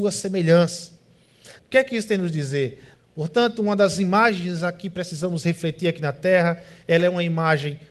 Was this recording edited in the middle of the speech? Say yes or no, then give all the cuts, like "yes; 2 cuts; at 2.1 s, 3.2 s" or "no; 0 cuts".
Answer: yes; 2 cuts; at 1.6 s, 2.9 s